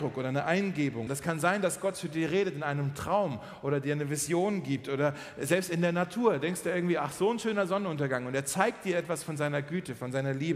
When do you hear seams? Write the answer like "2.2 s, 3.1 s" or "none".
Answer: 1.1 s